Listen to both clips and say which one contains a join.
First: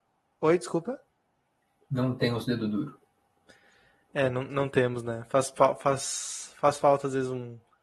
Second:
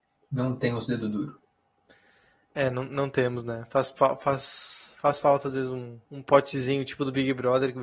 second; 1 cut; at 6.0 s

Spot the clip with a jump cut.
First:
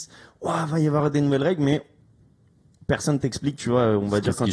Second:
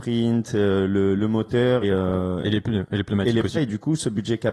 second; 2 cuts; at 1.8 s, 3.5 s

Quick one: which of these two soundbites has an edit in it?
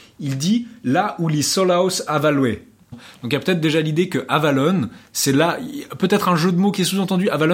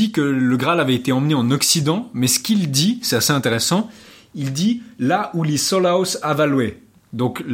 first; 1 cut; at 2.9 s

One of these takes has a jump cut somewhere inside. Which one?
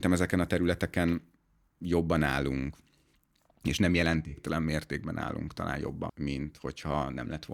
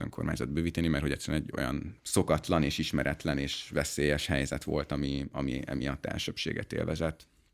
first; 1 cut; at 6.1 s

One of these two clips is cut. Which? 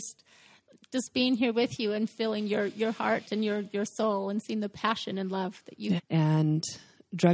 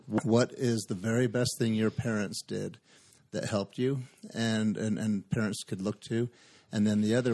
first; 1 cut; at 6.0 s

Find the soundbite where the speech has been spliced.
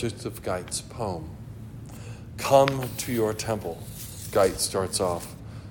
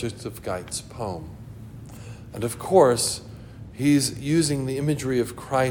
second; 1 cut; at 2.3 s

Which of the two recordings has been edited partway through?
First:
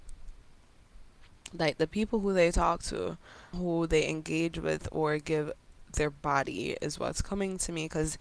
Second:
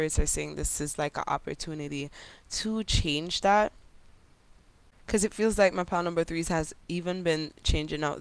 first; 1 cut; at 3.5 s

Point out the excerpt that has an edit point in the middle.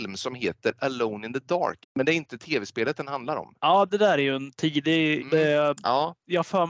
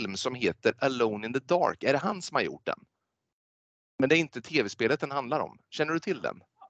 first; 3 cuts; at 1.8 s, 3.6 s, 5.2 s

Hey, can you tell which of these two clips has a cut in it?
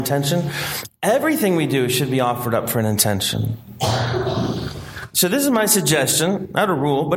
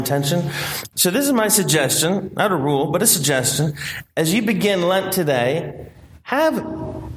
second; 1 cut; at 0.9 s

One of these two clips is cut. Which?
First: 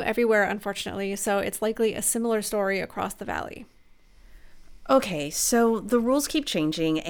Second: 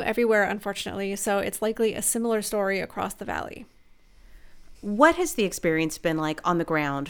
second; 1 cut; at 4.7 s

